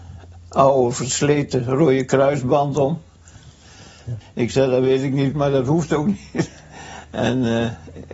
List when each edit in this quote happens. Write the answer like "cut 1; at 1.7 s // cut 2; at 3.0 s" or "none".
cut 1; at 4.2 s // cut 2; at 5.3 s

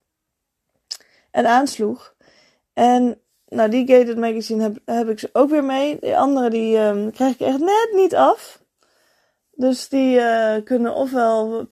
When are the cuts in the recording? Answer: none

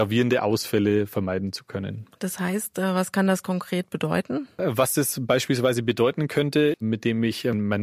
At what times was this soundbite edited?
cut 1; at 6.7 s

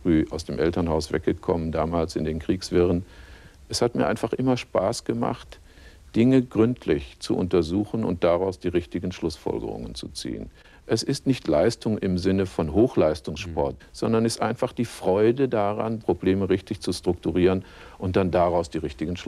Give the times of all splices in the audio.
cut 1; at 13.8 s // cut 2; at 16.0 s

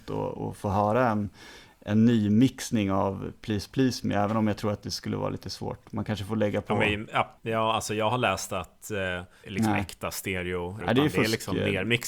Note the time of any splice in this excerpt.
cut 1; at 7.4 s // cut 2; at 9.4 s // cut 3; at 10.8 s

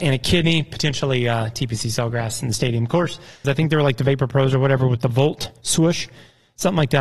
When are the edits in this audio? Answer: cut 1; at 3.4 s

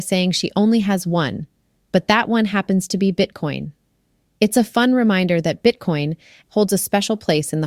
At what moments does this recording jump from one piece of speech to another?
cut 1; at 6.4 s

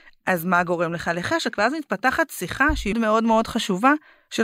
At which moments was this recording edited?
cut 1; at 2.9 s

